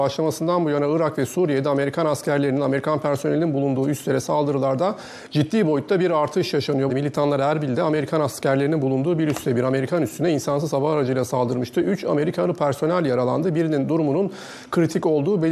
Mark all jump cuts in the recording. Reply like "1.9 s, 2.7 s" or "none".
6.9 s